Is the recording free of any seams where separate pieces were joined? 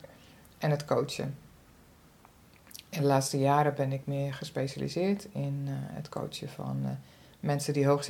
yes; 0 cuts

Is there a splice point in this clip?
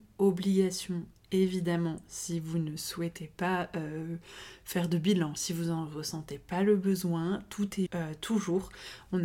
yes; 1 cut; at 7.9 s

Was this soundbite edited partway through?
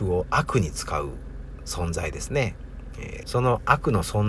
yes; 1 cut; at 3.2 s

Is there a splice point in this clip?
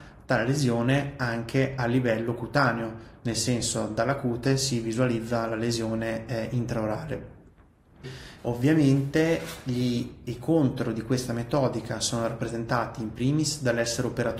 yes; 1 cut; at 8.4 s

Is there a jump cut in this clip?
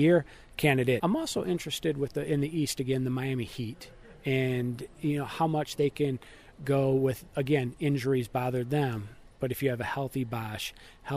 yes; 1 cut; at 1.0 s

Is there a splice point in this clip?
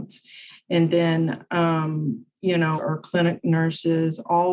yes; 1 cut; at 2.7 s

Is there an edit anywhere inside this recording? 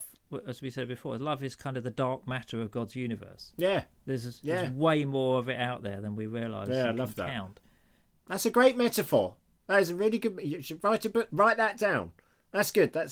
no; 0 cuts

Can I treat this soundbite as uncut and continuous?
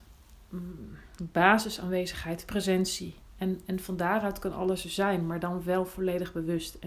yes; 0 cuts

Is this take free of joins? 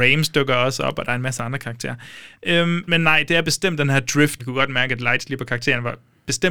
no; 2 cuts; at 2.9 s, 4.4 s

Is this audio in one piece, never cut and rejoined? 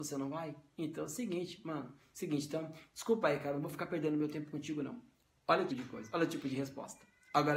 no; 1 cut; at 5.7 s

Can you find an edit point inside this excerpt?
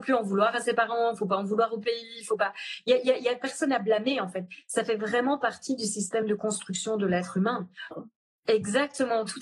yes; 1 cut; at 7.9 s

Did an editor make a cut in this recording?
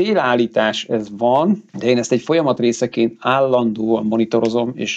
yes; 1 cut; at 1.7 s

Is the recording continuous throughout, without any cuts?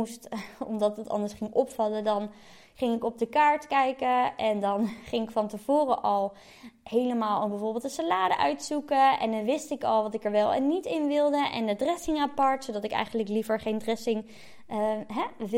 yes; 0 cuts

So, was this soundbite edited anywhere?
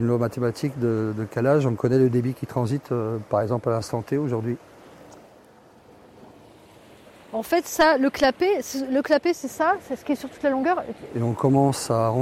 yes; 1 cut; at 11.1 s

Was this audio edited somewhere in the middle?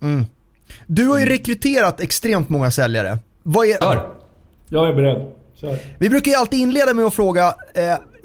yes; 1 cut; at 3.8 s

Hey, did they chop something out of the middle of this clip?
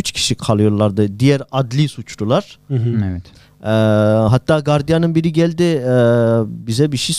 no; 0 cuts

